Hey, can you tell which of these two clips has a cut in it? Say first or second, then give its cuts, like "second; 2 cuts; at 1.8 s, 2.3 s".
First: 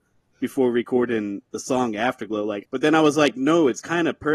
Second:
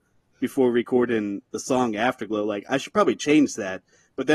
first; 1 cut; at 2.6 s